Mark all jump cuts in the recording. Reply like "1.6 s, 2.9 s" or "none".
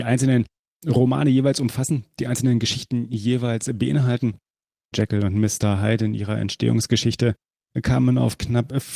4.9 s